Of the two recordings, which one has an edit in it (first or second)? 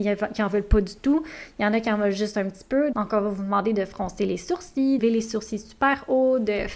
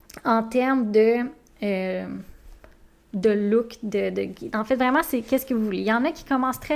first